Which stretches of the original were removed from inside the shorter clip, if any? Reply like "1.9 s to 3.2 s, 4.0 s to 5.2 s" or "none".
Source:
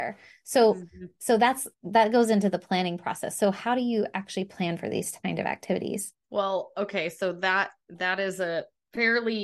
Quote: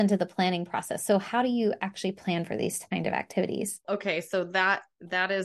6.2 s to 6.7 s